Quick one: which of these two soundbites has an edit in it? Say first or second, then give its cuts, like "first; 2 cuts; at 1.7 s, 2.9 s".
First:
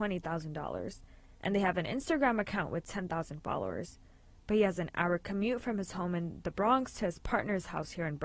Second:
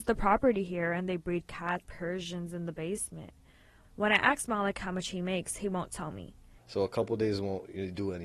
second; 2 cuts; at 1.8 s, 6.6 s